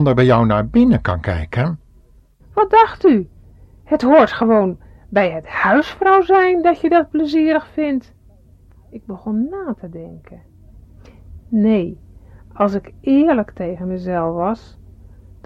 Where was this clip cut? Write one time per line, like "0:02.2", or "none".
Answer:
0:02.4